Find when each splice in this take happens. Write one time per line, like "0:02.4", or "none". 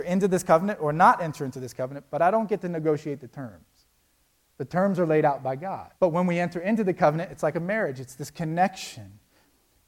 0:06.0